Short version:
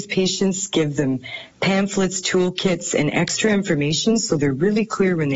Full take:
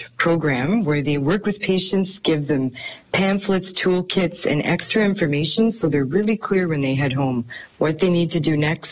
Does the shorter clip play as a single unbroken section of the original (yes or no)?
yes